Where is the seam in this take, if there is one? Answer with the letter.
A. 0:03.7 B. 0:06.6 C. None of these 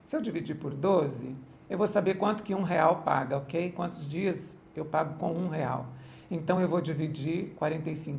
C